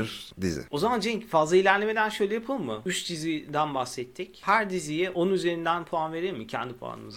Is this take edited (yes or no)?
no